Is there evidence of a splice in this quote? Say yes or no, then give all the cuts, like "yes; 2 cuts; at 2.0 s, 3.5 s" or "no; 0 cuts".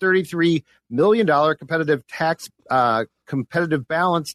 no; 0 cuts